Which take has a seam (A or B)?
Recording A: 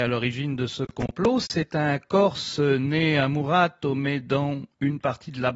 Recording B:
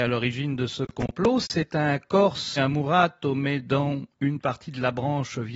B